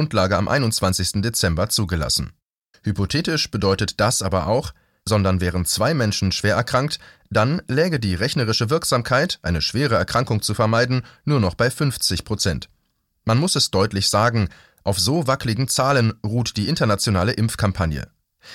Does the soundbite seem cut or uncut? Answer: cut